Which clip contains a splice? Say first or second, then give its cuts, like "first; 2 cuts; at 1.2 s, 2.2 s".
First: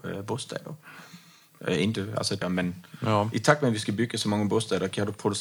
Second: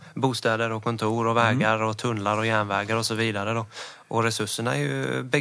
first; 1 cut; at 2.4 s